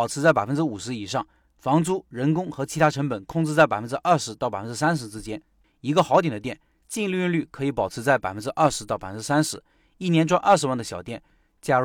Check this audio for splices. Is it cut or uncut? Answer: cut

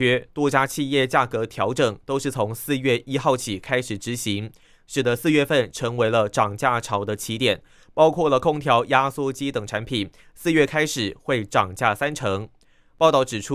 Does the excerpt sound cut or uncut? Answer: uncut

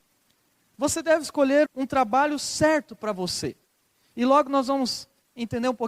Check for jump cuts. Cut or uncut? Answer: cut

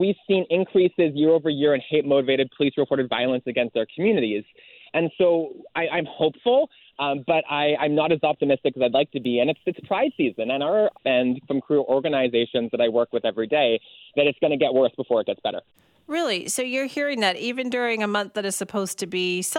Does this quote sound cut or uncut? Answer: cut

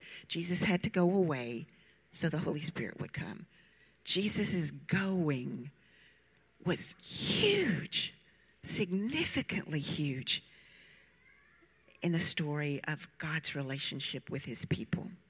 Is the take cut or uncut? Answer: uncut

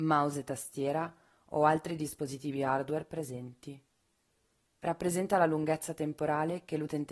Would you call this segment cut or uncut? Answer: cut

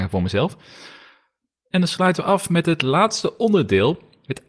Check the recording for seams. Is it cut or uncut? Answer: uncut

